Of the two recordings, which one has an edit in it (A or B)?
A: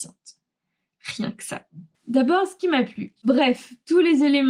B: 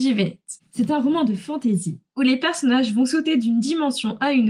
A